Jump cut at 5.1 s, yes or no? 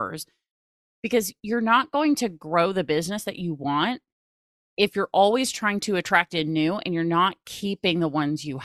no